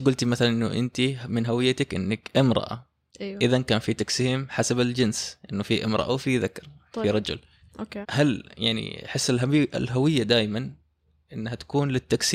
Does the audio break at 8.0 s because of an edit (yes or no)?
yes